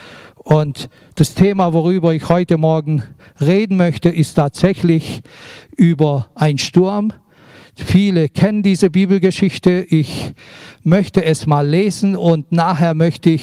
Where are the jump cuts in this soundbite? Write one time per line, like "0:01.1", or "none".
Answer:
none